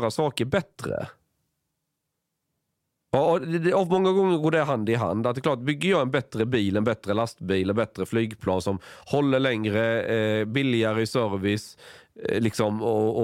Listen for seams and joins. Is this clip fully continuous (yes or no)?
yes